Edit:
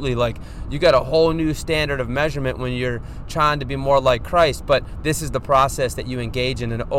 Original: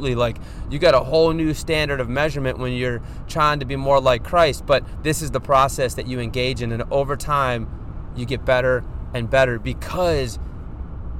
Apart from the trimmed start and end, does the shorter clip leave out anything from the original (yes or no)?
no